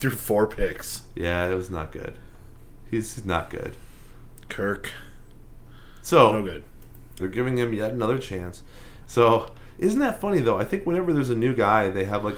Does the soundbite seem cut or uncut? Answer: cut